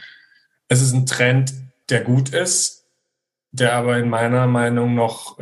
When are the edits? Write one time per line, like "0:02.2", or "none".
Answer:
0:01.8